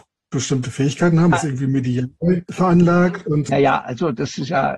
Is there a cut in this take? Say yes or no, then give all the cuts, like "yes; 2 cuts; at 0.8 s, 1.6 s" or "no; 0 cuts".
yes; 1 cut; at 1.3 s